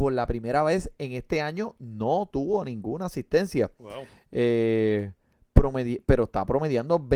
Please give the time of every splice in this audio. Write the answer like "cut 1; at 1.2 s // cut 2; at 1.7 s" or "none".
none